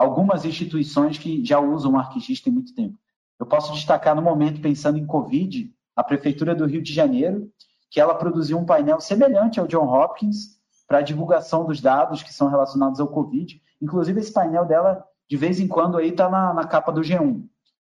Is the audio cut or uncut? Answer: cut